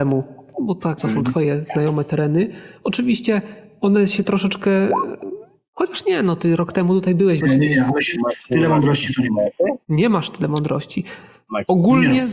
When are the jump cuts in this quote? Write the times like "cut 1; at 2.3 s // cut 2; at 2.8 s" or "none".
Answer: cut 1; at 1.0 s // cut 2; at 7.4 s